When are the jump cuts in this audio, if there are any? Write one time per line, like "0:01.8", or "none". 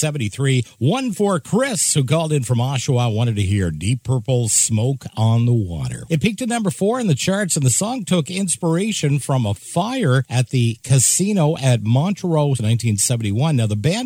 0:06.1
0:12.6